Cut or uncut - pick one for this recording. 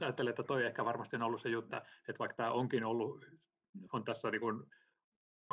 cut